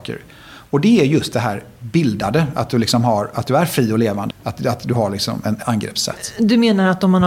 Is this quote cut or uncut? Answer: cut